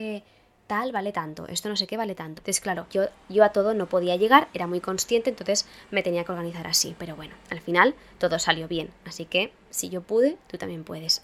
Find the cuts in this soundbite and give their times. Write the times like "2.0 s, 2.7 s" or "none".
2.4 s